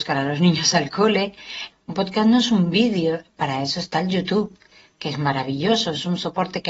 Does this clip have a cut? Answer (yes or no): yes